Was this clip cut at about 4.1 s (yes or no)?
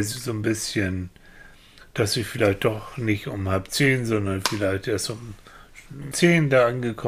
no